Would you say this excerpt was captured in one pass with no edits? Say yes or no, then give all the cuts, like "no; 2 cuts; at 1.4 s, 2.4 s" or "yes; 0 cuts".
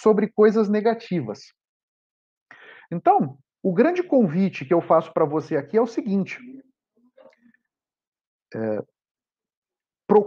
yes; 0 cuts